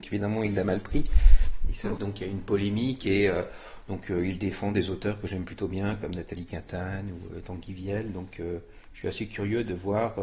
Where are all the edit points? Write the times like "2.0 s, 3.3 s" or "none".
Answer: 2.0 s